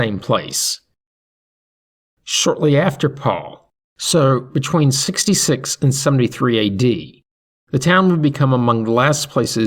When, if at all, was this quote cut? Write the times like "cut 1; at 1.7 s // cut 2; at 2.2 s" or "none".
cut 1; at 3.9 s